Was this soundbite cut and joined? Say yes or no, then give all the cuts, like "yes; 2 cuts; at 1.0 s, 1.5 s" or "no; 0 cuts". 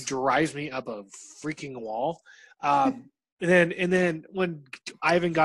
no; 0 cuts